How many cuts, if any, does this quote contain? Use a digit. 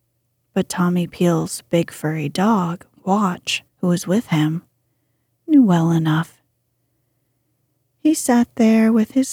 1